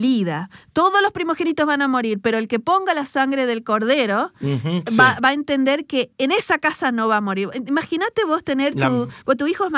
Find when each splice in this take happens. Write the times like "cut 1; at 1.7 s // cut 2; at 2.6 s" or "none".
none